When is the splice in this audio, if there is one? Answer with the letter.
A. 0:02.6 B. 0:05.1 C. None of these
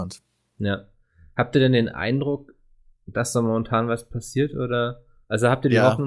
C